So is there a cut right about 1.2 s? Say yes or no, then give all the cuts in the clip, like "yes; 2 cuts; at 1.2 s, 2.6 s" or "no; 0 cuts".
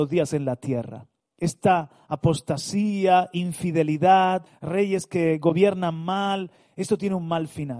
yes; 2 cuts; at 1.2 s, 4.5 s